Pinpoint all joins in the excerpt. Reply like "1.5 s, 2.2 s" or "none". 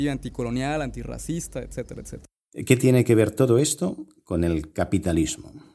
none